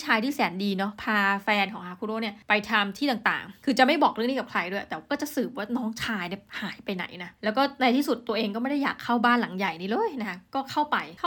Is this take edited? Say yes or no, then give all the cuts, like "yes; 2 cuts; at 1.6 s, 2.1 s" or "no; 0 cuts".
no; 0 cuts